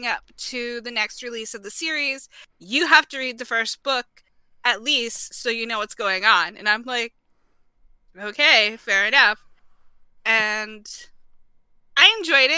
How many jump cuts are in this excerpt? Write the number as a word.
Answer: one